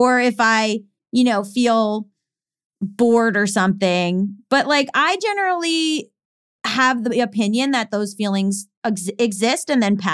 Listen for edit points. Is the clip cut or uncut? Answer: uncut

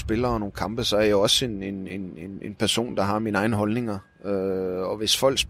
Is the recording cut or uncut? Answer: uncut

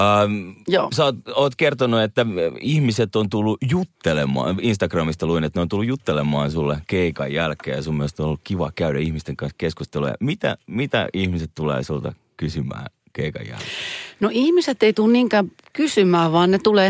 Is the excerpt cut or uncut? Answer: uncut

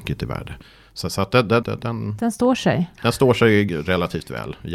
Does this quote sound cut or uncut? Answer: cut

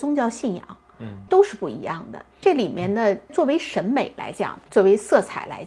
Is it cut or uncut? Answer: cut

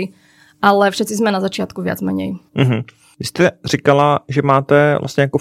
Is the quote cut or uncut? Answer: cut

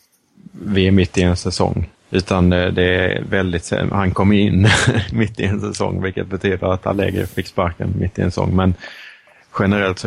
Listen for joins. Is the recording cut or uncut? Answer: cut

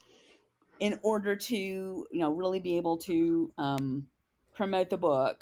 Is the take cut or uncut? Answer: uncut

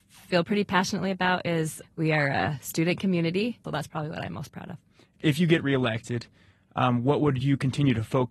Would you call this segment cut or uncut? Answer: cut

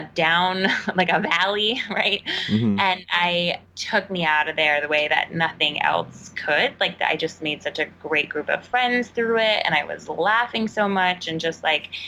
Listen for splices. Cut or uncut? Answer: cut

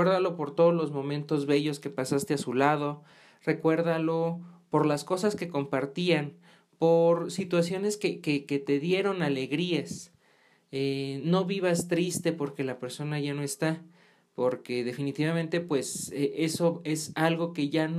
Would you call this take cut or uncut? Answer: uncut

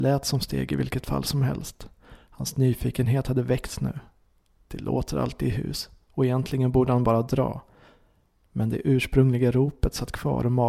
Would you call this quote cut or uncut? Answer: uncut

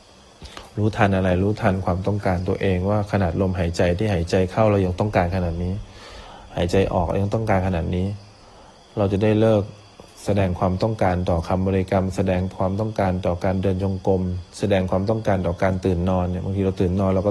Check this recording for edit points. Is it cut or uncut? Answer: cut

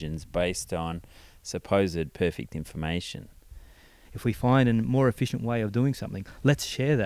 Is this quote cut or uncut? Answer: cut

